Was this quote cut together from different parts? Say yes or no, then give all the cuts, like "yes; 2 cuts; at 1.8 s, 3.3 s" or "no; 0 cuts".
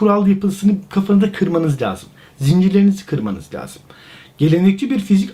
no; 0 cuts